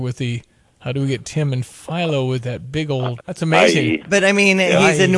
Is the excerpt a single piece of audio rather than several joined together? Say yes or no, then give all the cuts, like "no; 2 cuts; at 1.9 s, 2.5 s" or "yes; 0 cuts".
no; 1 cut; at 3.2 s